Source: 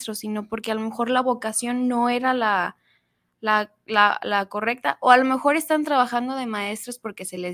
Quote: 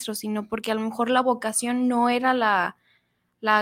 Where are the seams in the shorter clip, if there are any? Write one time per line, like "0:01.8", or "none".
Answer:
none